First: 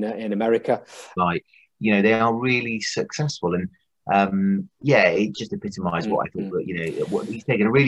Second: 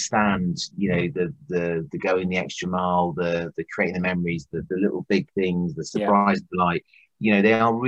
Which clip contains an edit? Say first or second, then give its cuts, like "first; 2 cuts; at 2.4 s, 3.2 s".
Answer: first; 1 cut; at 1.2 s